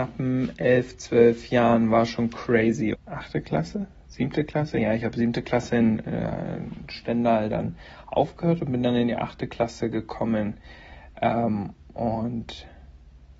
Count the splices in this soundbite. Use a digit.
1